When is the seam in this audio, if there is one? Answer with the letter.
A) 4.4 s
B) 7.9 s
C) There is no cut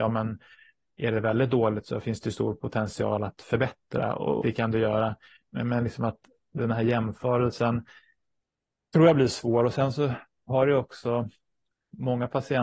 A